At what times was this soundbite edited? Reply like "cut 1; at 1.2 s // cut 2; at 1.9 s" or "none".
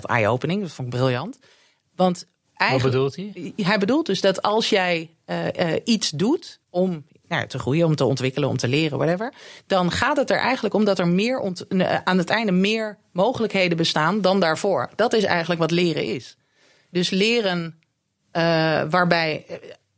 cut 1; at 6.6 s